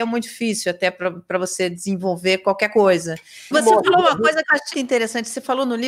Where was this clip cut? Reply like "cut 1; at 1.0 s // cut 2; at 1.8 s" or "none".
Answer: cut 1; at 3.5 s // cut 2; at 4.7 s